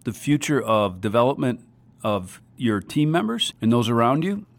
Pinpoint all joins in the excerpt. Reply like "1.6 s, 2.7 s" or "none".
3.5 s